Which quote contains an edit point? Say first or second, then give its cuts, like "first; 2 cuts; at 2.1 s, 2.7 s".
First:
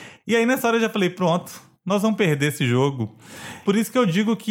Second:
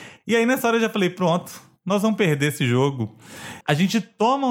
second; 1 cut; at 3.6 s